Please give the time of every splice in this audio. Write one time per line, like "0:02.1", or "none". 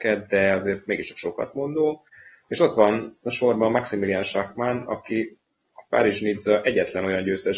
none